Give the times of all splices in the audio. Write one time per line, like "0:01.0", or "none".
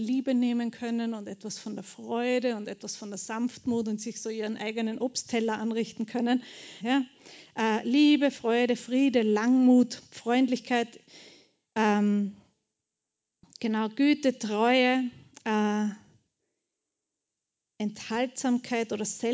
0:06.8